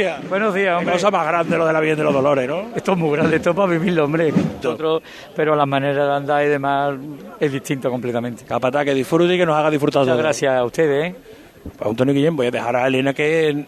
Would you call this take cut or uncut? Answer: cut